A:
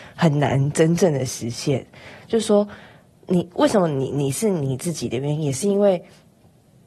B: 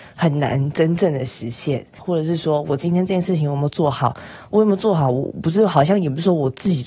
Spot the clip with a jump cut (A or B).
B